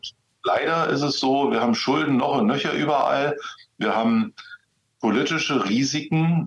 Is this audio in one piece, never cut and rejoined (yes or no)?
yes